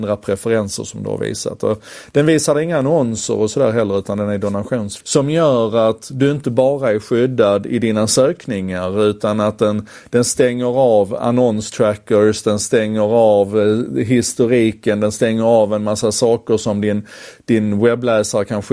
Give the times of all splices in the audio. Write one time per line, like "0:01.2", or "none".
0:05.0